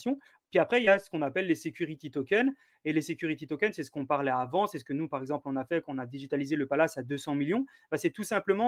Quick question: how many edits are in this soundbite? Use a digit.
0